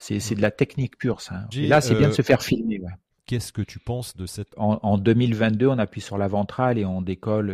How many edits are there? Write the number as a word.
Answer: three